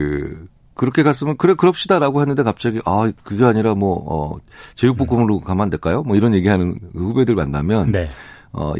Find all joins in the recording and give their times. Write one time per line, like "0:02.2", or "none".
none